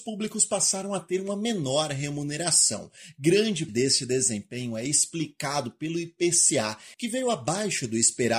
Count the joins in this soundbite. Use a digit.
2